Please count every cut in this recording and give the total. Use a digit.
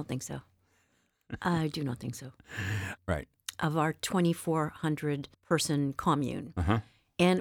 2